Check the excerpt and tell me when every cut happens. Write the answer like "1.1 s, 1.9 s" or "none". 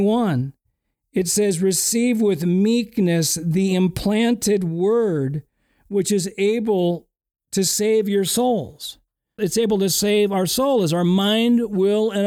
9.4 s